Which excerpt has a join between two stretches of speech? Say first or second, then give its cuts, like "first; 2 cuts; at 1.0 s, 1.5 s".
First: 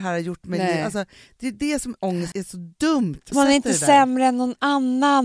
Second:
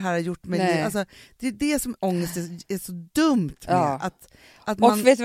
first; 2 cuts; at 2.3 s, 3.3 s